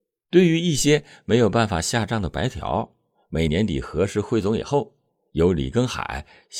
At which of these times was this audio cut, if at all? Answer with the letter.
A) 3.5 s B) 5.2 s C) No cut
A